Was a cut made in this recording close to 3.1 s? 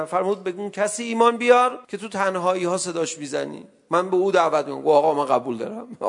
no; 1 cut; at 1.8 s

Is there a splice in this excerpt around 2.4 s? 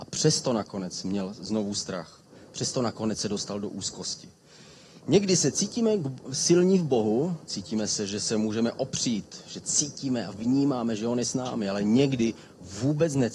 no; 1 cut; at 7.5 s

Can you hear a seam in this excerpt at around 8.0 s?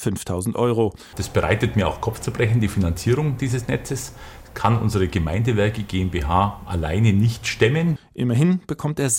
yes; 2 cuts; at 1.1 s, 8.0 s

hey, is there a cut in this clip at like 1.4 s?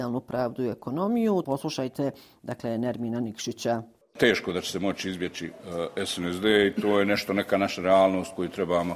yes; 1 cut; at 1.4 s

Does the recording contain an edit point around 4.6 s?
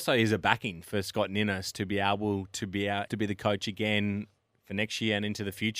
no; 1 cut; at 3.1 s

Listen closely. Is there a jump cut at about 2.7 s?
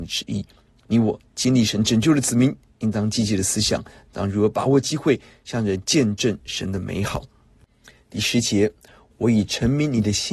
no; 1 cut; at 9.1 s

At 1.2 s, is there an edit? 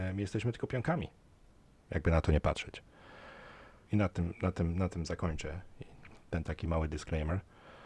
no; 1 cut; at 3.9 s

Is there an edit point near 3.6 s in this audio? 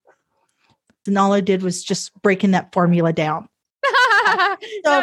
yes; 2 cuts; at 1.1 s, 3.6 s

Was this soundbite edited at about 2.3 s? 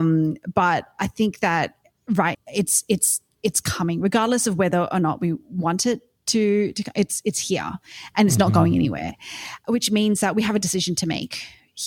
yes; 1 cut; at 2.3 s

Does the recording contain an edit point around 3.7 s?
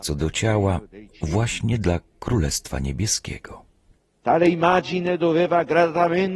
no; 0 cuts

